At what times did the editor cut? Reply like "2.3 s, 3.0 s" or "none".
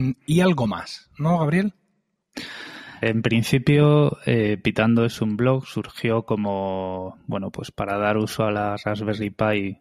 3.0 s